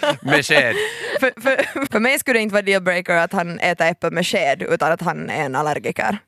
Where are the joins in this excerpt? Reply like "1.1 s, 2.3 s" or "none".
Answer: 1.9 s

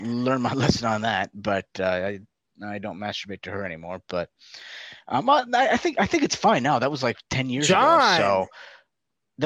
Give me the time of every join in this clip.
none

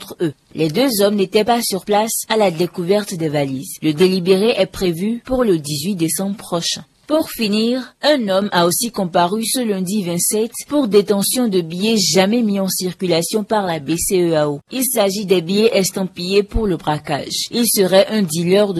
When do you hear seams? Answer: none

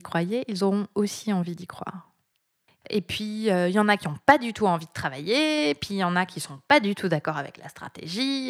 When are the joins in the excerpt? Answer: 2.8 s

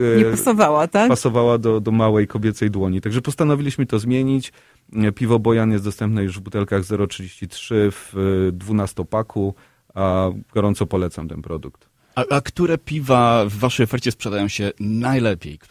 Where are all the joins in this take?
none

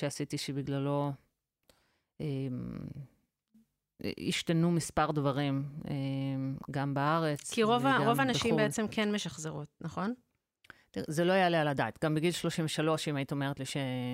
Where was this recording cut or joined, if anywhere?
none

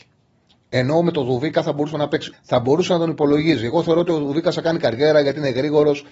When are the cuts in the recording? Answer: 2.3 s

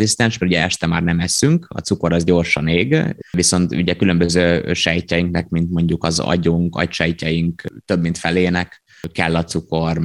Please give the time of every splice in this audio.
3.2 s

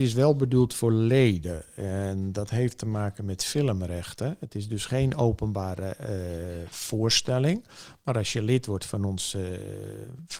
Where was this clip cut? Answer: none

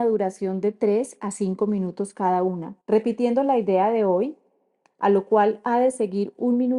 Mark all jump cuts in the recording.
2.8 s

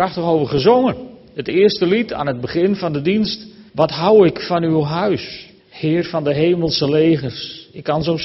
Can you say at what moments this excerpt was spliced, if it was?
3.7 s, 5.6 s

